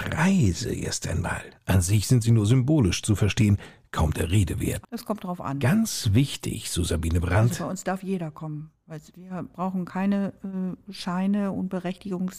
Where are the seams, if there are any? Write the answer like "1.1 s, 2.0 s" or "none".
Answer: 4.8 s